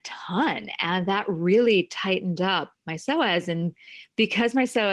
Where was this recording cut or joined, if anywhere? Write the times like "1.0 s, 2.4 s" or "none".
none